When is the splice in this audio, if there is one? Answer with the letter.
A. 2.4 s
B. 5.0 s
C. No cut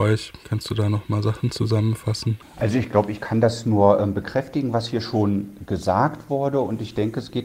C